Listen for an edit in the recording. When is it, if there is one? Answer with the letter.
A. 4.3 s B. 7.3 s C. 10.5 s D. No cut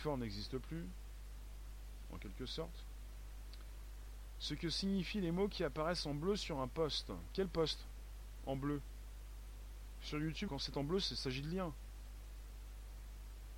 C